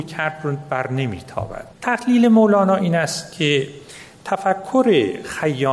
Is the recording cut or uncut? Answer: cut